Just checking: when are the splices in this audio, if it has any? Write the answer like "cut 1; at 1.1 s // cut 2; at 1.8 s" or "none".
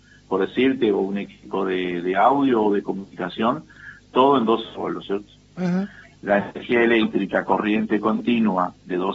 cut 1; at 6.1 s